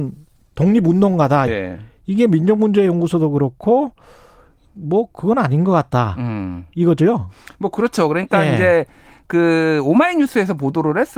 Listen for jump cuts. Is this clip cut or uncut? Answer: cut